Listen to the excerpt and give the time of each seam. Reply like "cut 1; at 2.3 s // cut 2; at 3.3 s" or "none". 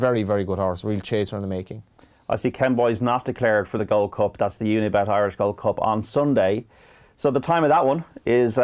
none

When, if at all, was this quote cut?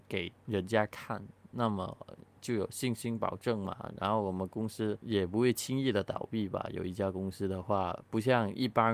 none

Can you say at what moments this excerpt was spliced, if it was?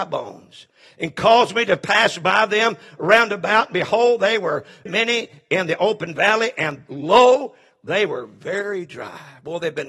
cut 1; at 4.9 s

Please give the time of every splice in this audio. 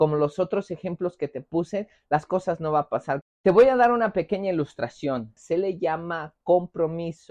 cut 1; at 3.2 s // cut 2; at 5.4 s

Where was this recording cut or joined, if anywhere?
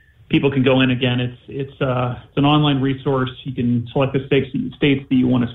none

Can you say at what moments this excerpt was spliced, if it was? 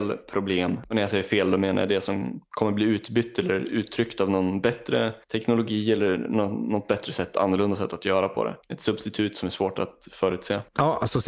none

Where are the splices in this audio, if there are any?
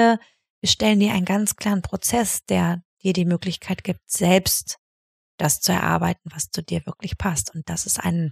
none

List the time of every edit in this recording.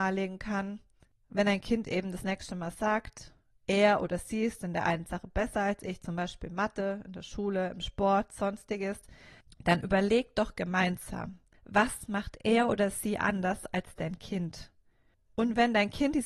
none

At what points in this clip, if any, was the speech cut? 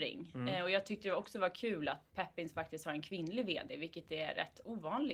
cut 1; at 2.1 s

